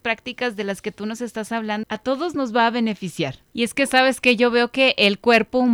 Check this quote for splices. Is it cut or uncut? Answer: cut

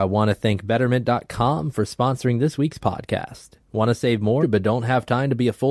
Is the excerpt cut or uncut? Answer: cut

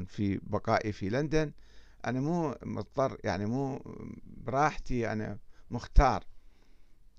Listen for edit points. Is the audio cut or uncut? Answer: uncut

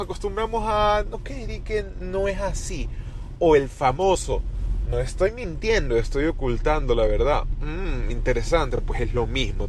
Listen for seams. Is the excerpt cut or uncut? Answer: uncut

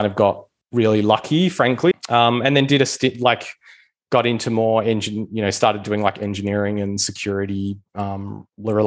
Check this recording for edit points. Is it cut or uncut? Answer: cut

